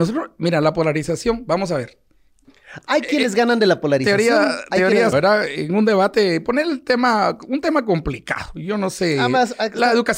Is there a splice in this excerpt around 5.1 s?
yes; 1 cut; at 5.1 s

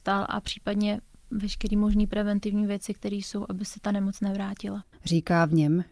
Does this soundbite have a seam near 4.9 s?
yes; 1 cut; at 4.9 s

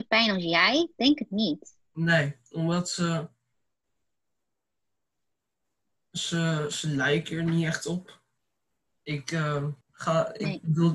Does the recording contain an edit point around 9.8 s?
yes; 1 cut; at 9.8 s

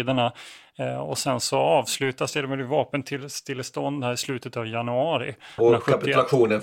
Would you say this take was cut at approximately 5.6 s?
yes; 1 cut; at 5.6 s

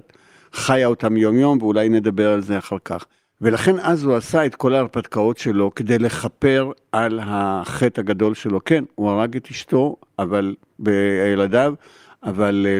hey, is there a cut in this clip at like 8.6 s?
no; 0 cuts

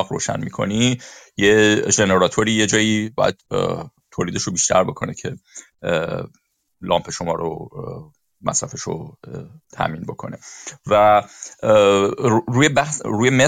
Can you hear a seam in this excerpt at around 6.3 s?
no; 0 cuts

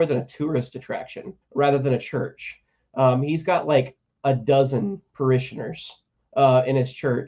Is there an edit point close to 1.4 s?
yes; 1 cut; at 1.4 s

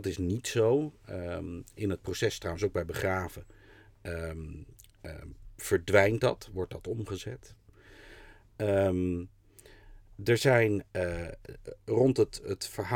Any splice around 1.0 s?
no; 0 cuts

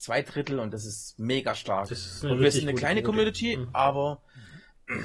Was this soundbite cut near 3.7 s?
no; 0 cuts

